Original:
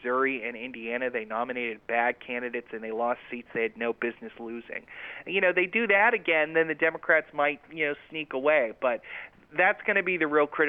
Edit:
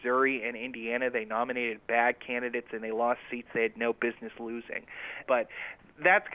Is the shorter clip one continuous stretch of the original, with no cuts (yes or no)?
no